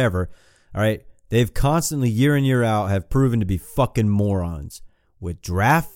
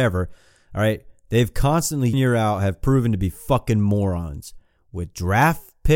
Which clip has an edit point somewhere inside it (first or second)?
second